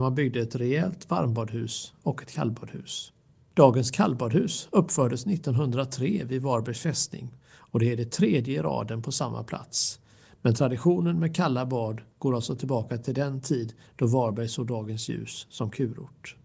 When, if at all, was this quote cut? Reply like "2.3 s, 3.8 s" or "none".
none